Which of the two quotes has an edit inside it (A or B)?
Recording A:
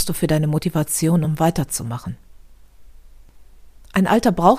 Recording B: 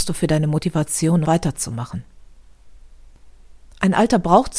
B